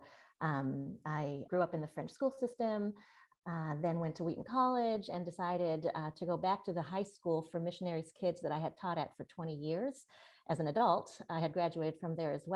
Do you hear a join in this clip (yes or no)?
yes